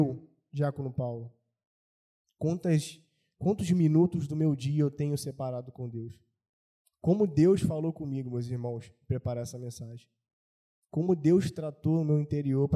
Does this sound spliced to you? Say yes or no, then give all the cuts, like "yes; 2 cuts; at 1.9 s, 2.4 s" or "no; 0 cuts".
no; 0 cuts